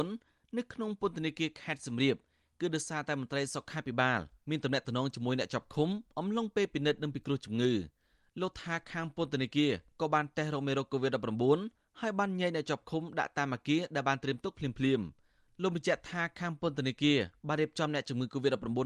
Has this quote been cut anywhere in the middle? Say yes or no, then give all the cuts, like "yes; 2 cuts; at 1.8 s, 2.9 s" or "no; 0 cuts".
no; 0 cuts